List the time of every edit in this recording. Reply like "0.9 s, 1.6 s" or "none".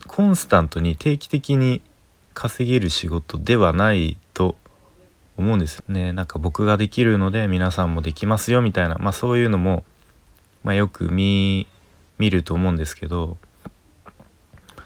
5.8 s

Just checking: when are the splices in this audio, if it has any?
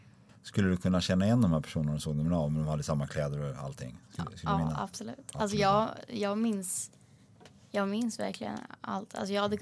none

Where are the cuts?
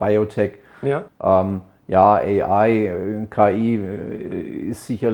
1.1 s

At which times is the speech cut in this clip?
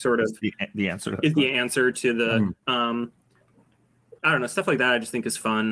2.6 s, 4.2 s

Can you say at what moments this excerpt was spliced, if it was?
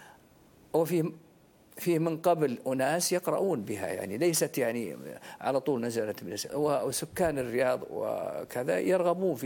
6.5 s

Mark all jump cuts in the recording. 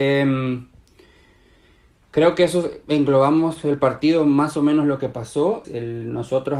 5.6 s

